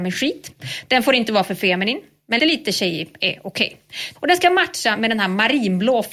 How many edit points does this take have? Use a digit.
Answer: 2